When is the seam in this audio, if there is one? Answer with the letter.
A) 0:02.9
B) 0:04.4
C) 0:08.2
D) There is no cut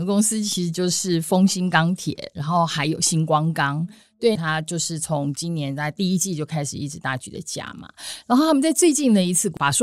B